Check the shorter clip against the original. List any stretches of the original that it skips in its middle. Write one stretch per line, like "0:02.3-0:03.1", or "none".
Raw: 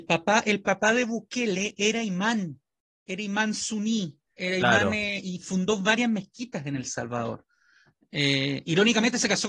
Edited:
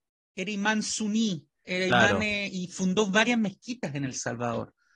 none